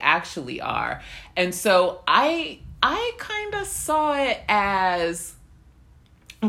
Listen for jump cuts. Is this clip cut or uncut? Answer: uncut